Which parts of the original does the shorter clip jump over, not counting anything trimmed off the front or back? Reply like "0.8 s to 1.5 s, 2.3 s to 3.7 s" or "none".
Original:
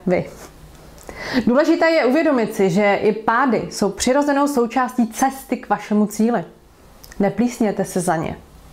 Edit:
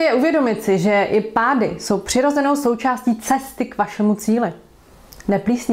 none